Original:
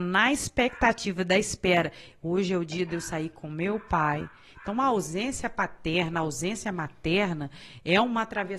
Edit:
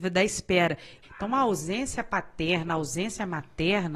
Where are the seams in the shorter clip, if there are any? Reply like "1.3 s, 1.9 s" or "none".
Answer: 1.0 s